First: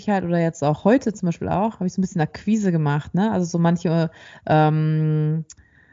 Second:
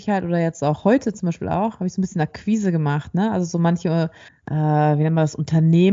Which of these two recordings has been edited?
second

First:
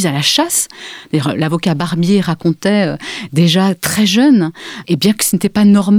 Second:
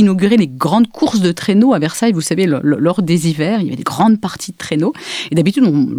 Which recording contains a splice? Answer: first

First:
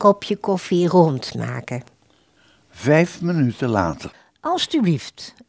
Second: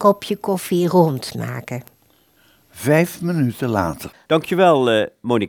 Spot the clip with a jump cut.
second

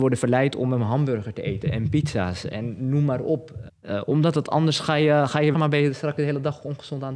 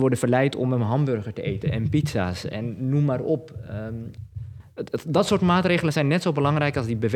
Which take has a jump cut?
first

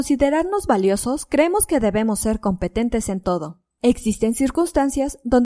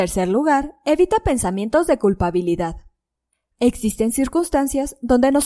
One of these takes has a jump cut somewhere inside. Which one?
first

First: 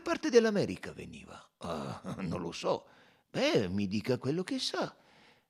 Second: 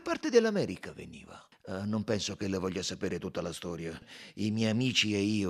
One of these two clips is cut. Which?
second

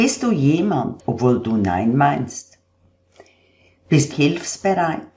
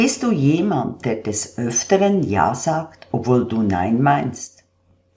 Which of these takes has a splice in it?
first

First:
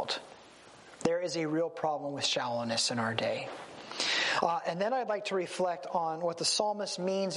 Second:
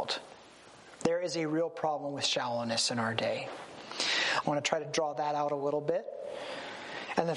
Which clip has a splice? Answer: second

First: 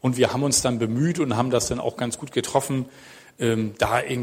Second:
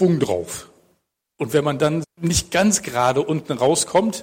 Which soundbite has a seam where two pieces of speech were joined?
second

